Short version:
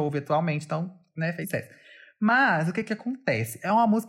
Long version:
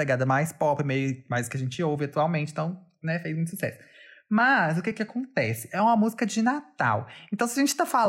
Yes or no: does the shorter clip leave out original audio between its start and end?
yes